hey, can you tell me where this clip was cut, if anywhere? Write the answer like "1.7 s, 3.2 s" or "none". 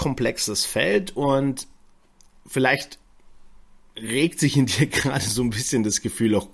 none

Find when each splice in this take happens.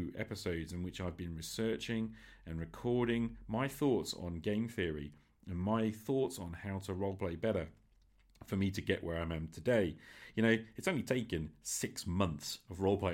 none

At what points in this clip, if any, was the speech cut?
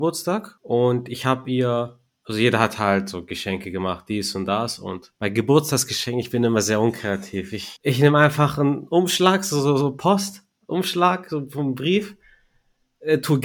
none

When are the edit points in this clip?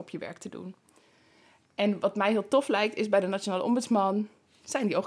none

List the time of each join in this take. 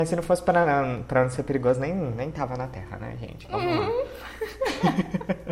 none

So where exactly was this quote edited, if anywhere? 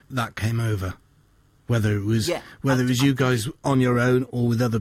none

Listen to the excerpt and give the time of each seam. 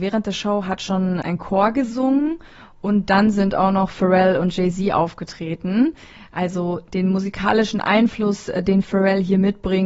1.2 s

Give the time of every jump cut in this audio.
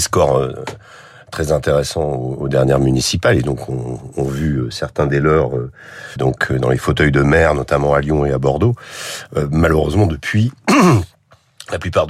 6.2 s

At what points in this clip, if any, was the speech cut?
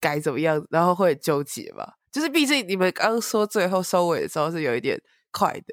none

